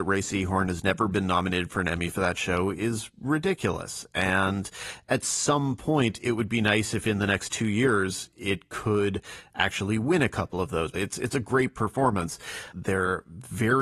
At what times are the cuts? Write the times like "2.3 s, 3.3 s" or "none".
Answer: 10.9 s, 12.7 s